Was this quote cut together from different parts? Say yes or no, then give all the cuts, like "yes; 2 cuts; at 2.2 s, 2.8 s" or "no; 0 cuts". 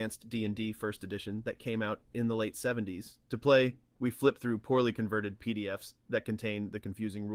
no; 0 cuts